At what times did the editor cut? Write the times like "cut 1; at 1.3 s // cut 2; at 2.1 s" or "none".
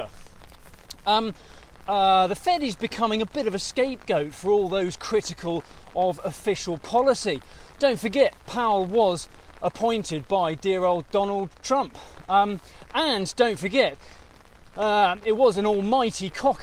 cut 1; at 1.8 s